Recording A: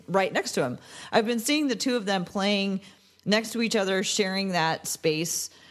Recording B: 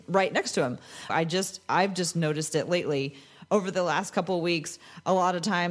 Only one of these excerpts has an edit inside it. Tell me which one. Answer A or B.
B